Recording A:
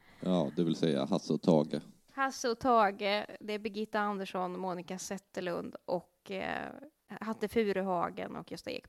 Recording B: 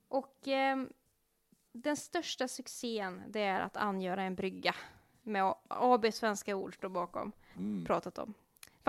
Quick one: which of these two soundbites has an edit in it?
B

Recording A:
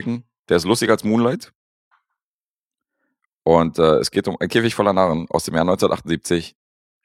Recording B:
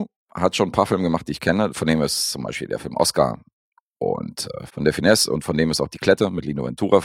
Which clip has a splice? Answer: B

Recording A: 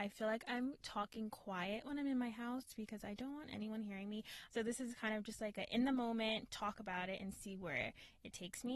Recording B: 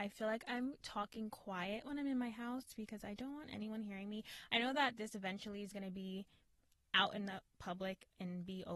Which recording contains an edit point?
A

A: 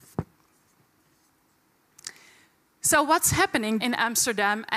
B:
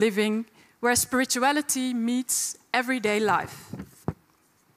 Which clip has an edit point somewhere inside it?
A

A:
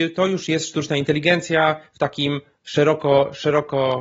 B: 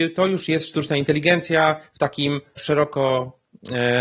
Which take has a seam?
B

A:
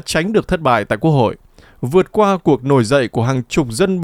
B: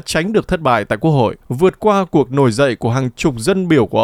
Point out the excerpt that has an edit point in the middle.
B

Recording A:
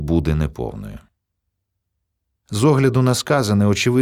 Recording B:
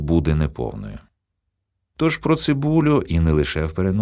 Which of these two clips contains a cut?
B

